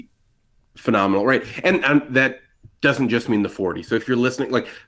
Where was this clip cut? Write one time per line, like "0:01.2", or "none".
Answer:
none